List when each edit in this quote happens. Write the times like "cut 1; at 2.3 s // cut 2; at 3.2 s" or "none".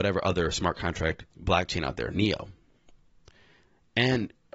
cut 1; at 1.3 s